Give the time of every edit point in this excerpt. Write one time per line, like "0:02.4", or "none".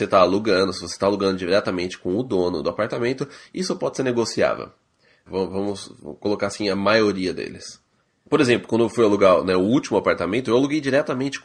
0:02.6
0:05.3
0:08.3